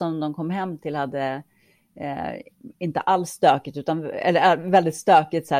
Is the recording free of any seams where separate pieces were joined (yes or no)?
yes